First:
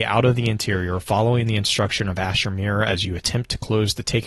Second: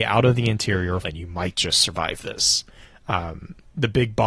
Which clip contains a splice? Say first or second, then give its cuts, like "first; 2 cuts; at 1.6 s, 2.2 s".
second; 1 cut; at 1.0 s